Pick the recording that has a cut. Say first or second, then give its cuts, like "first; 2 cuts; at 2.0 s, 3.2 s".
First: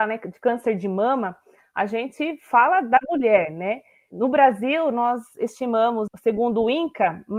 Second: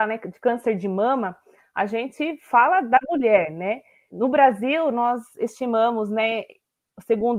first; 1 cut; at 6.1 s